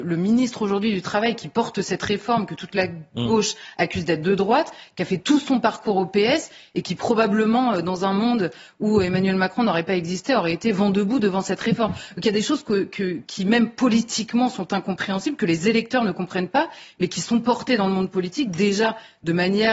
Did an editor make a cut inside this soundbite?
no; 0 cuts

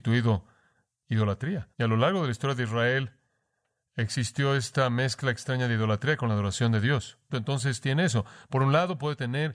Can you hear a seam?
yes; 2 cuts; at 1.7 s, 7.3 s

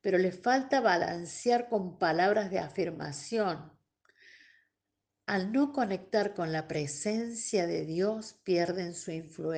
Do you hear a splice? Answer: no; 0 cuts

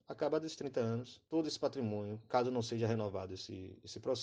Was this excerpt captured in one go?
yes; 0 cuts

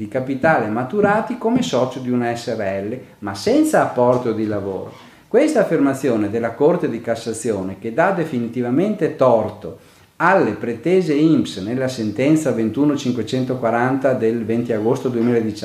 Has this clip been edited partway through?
yes; 1 cut; at 5.1 s

